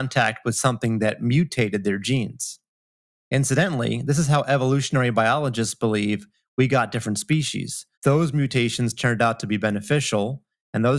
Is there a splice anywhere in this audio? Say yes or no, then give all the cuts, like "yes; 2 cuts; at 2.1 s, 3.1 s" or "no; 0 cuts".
yes; 1 cut; at 7.9 s